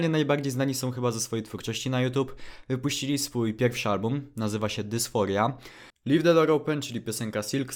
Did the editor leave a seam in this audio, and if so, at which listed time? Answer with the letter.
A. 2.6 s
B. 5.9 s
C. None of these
B